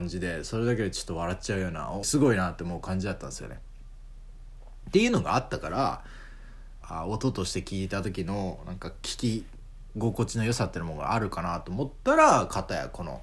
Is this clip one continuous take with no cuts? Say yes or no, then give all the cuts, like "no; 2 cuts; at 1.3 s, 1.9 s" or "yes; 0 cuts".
no; 2 cuts; at 2.0 s, 6.8 s